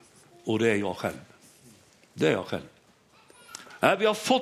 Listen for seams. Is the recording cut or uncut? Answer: uncut